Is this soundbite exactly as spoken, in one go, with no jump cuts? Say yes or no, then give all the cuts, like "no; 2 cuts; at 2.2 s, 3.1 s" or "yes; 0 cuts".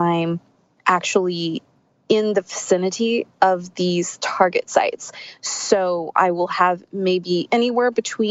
yes; 0 cuts